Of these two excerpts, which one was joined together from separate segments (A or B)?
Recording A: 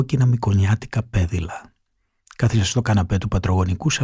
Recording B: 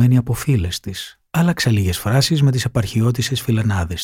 B